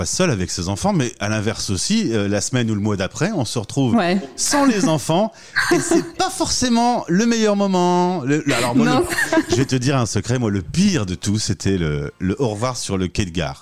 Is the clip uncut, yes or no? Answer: yes